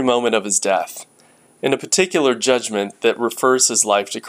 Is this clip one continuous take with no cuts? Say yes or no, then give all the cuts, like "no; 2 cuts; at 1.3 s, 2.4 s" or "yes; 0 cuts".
yes; 0 cuts